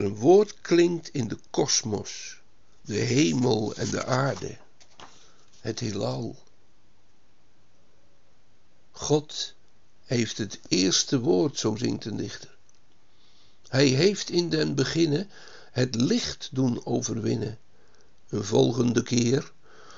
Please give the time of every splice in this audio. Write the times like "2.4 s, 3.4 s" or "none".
2.8 s, 18.2 s